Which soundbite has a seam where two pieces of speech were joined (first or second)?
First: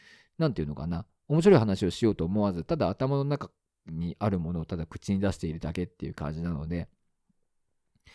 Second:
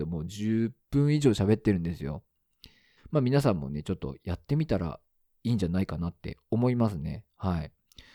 second